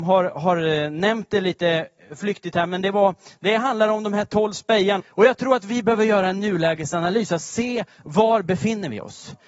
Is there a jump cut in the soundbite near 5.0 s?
yes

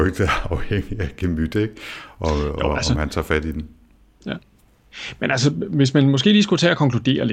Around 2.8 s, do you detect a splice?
no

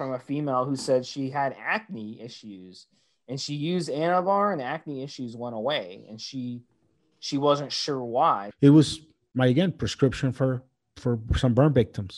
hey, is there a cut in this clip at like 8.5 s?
yes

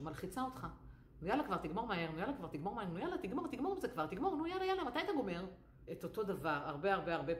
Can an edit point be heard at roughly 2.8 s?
no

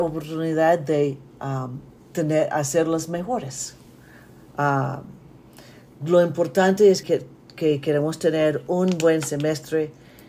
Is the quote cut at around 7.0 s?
yes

